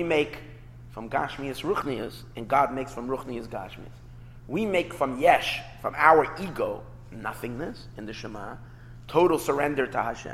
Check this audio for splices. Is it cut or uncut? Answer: uncut